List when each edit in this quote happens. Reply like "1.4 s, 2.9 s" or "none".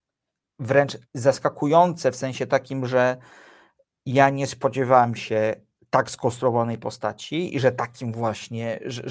1.0 s